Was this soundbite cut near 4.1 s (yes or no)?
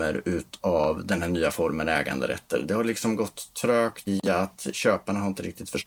yes